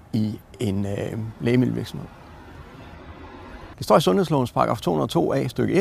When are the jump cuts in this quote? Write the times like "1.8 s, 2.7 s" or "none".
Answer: 3.7 s